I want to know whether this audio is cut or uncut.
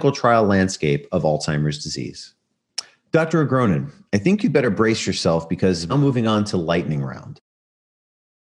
cut